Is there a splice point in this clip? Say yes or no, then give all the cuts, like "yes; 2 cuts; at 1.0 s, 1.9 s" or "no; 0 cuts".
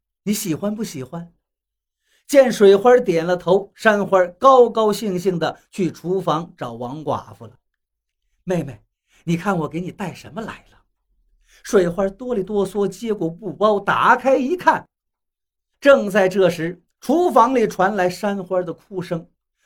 yes; 2 cuts; at 8.1 s, 15.7 s